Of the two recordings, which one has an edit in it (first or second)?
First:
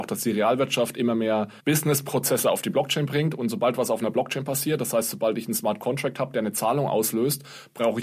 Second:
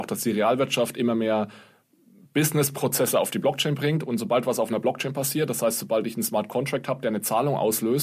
first